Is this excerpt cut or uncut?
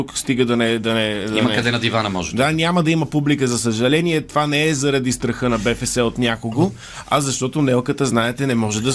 uncut